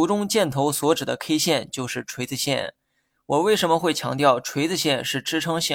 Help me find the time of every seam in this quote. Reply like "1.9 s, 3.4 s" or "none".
3.1 s